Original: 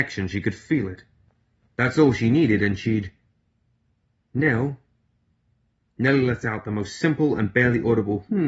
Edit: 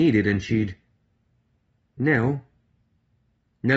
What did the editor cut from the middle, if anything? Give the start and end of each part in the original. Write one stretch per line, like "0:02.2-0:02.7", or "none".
none

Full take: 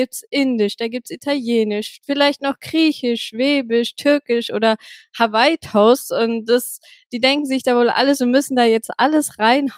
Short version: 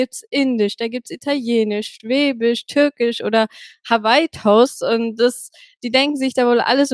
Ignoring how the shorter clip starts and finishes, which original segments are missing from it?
0:02.0-0:03.3

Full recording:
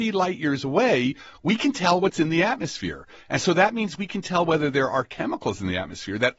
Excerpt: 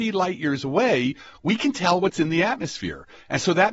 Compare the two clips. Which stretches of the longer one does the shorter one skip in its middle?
none

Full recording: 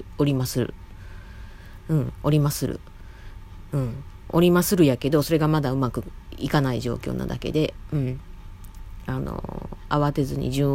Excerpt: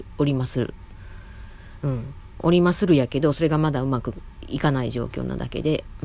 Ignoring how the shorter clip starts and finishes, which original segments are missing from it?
0:01.8-0:03.7

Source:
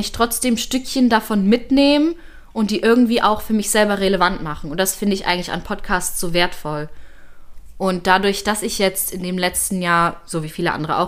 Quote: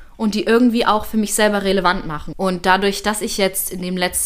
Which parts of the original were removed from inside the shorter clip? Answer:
0:04.7-0:07.7

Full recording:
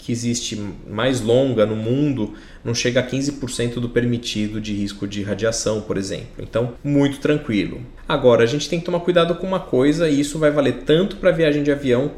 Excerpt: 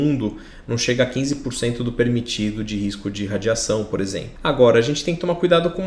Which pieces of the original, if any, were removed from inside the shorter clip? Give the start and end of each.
0:06.3-0:08.0

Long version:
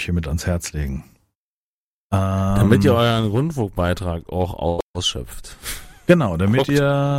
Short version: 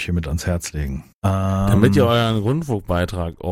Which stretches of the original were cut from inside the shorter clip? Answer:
0:01.1-0:02.0

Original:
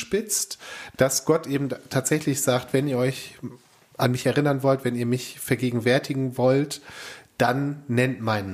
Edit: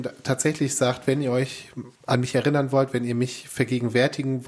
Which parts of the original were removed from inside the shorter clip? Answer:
0:03.6-0:03.9

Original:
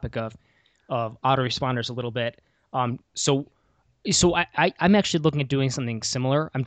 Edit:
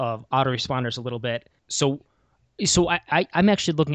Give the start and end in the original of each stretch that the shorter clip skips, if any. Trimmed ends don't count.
0:02.5-0:03.1

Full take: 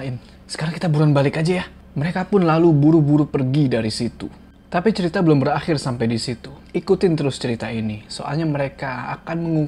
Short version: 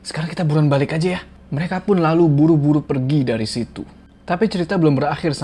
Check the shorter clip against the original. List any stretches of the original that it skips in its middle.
none

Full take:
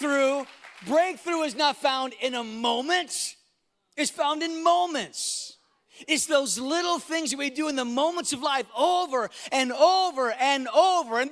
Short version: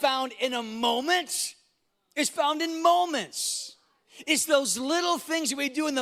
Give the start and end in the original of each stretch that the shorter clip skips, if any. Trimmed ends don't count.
none

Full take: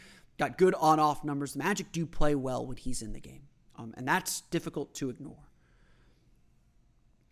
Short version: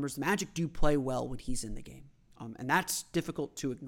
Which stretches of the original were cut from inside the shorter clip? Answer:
none

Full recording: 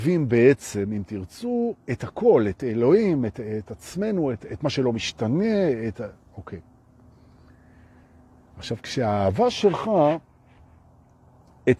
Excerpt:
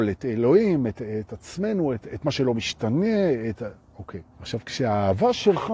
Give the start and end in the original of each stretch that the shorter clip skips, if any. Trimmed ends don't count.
0:06.7-0:08.5

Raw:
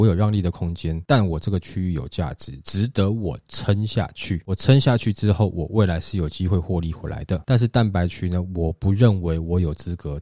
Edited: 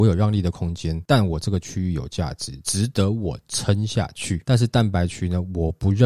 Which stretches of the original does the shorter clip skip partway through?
0:04.4-0:07.4

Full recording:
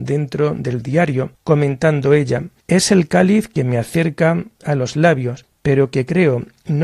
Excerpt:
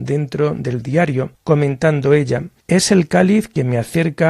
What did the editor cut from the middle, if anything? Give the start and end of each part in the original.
none

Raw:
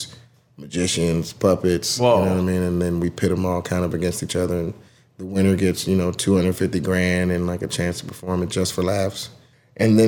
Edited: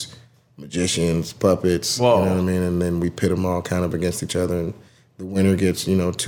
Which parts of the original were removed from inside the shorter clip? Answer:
none

